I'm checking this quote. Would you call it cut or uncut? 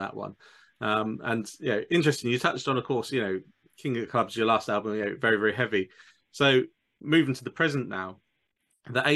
uncut